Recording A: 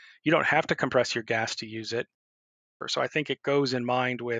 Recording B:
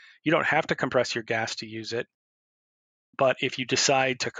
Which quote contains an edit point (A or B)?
A